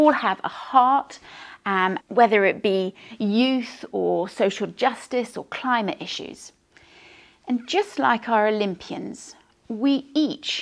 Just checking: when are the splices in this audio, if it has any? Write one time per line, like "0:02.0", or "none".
0:02.0

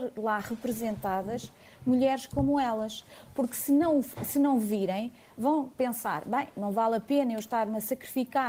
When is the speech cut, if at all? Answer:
none

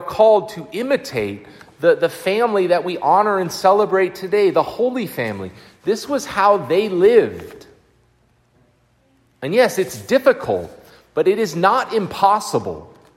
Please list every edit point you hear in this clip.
0:09.3

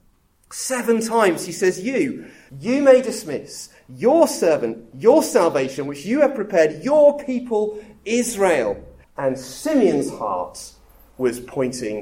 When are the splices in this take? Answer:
0:02.5
0:09.0

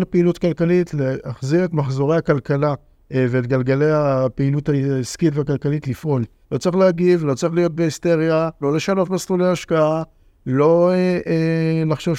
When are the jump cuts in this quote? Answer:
0:06.4
0:08.6

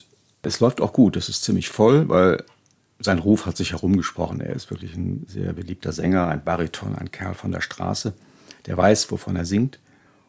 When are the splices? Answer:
none

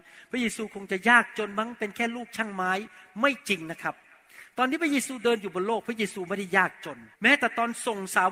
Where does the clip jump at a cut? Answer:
0:07.1

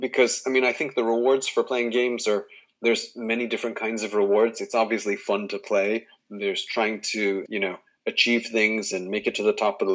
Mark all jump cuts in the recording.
0:06.2
0:07.5

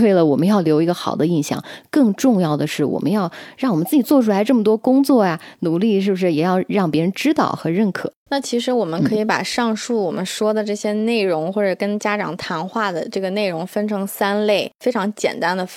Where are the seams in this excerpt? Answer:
0:08.3

